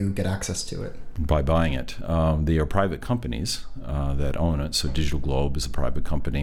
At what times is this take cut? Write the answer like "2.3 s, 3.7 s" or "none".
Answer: none